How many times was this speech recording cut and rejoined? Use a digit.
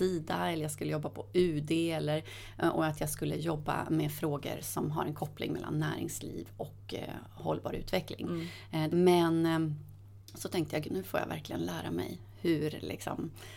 2